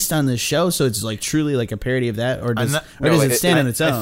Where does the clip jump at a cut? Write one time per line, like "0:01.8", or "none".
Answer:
none

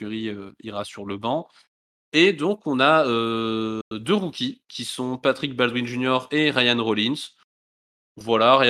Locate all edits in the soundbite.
none

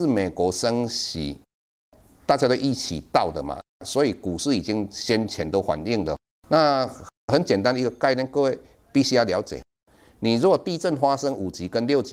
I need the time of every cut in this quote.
0:06.4

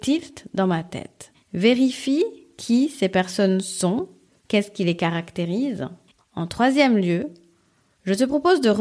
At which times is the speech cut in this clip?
0:01.3

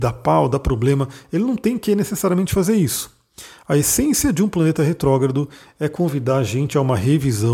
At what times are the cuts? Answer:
none

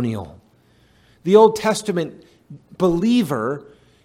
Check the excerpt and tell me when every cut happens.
none

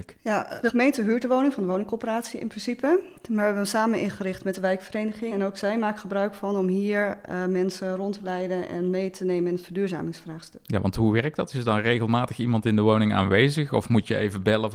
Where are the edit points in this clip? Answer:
0:05.3

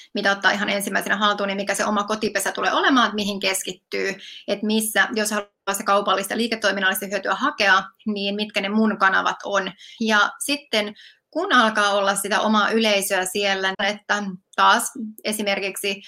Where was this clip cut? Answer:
0:10.0
0:13.7

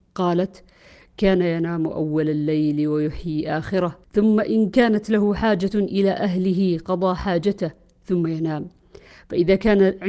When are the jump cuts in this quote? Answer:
0:04.0

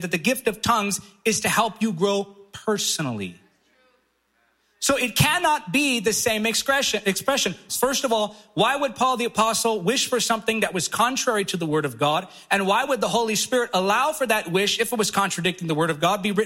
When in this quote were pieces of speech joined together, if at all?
0:07.7

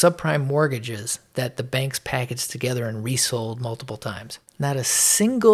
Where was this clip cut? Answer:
0:04.5

